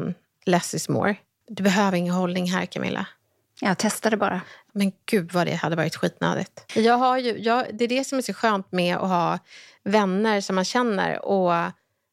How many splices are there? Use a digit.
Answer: 3